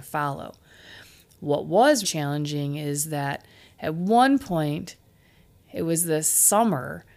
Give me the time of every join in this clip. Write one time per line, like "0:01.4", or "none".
0:02.0